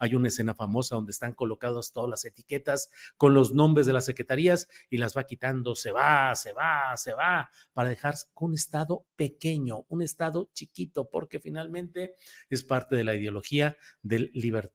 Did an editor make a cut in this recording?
no; 0 cuts

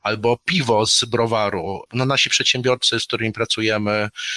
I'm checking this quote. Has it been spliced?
no; 0 cuts

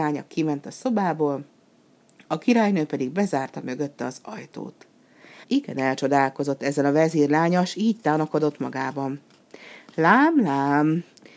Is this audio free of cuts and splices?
no; 1 cut; at 5.4 s

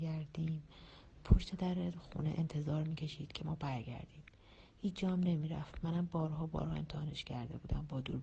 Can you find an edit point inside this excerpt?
no; 0 cuts

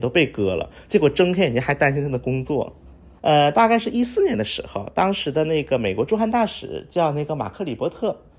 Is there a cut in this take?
yes; 1 cut; at 3.1 s

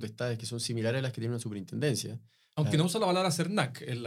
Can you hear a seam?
no; 0 cuts

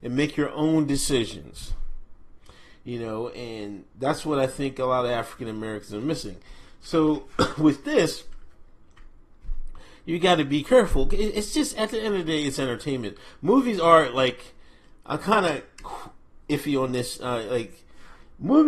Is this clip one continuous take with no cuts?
yes; 0 cuts

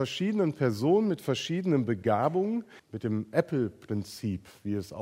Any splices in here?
yes; 1 cut; at 2.8 s

